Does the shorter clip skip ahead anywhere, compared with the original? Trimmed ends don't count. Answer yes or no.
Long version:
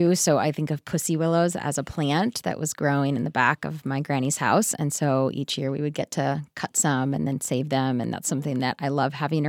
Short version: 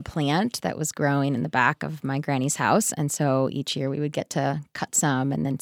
no